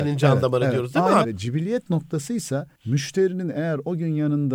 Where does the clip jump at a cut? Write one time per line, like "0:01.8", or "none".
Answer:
0:01.2
0:02.7